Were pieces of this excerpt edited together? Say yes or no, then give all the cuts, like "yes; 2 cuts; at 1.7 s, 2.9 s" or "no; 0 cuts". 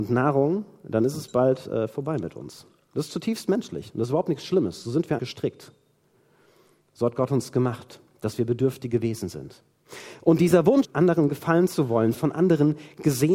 yes; 3 cuts; at 5.2 s, 10.8 s, 12.1 s